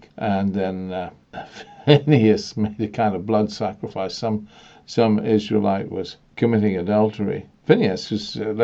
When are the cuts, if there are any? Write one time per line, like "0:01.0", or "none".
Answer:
none